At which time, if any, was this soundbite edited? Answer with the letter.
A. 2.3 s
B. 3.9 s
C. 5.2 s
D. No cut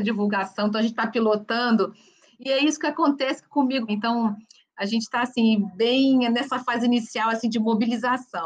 B